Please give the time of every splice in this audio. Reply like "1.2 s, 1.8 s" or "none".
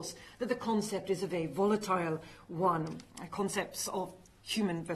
none